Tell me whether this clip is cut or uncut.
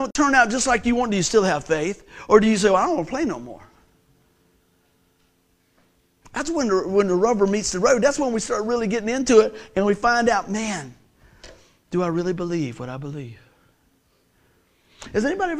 uncut